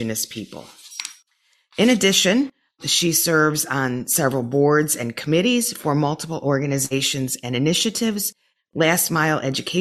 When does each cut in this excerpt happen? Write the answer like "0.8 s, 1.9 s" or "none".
8.5 s